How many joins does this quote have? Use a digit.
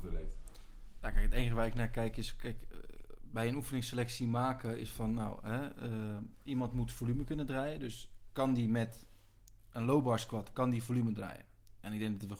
0